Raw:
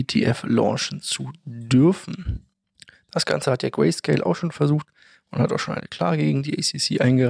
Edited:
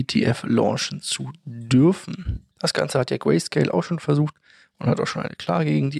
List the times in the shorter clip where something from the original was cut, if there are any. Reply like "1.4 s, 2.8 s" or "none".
2.5 s